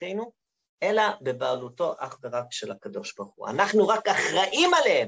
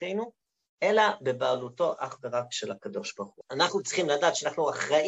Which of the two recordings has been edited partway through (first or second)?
second